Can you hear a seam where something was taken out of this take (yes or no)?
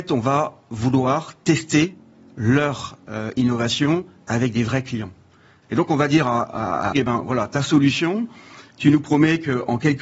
yes